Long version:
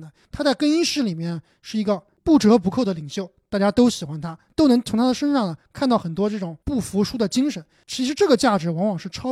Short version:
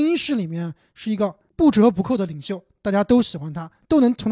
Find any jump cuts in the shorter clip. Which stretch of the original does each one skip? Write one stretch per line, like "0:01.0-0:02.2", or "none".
none